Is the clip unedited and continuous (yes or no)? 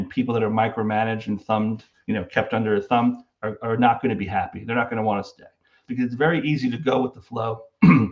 no